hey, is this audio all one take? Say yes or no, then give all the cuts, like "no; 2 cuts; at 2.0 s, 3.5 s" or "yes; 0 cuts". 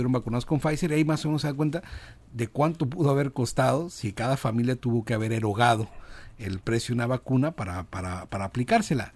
yes; 0 cuts